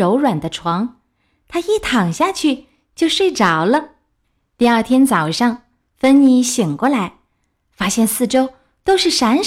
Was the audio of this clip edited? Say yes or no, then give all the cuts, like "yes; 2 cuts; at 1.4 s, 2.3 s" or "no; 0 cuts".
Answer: no; 0 cuts